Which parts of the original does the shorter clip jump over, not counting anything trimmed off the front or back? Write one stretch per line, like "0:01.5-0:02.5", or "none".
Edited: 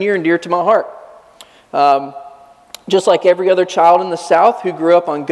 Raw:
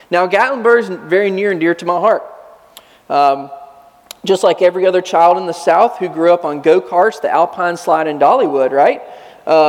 none